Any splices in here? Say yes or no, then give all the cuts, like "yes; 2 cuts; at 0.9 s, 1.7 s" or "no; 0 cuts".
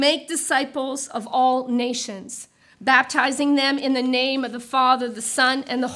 no; 0 cuts